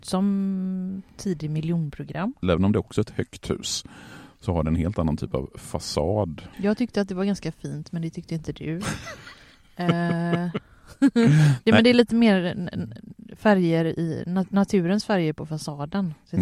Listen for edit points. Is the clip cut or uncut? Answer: cut